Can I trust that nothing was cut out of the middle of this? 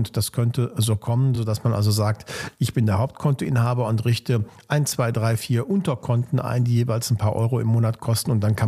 yes; 0 cuts

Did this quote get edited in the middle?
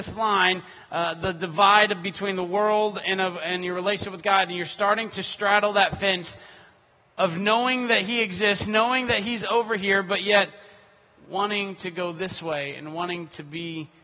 no; 0 cuts

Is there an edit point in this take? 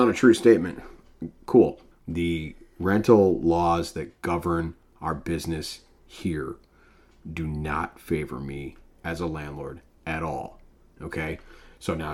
yes; 1 cut; at 1.9 s

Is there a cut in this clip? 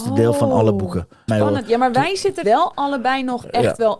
yes; 2 cuts; at 1.3 s, 2.4 s

